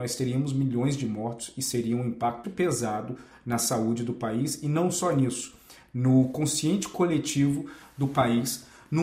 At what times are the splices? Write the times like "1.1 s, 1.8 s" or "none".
2.4 s